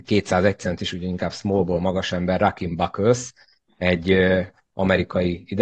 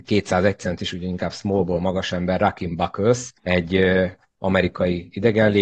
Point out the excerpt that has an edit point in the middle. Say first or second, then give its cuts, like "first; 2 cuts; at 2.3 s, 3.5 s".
second; 1 cut; at 3.4 s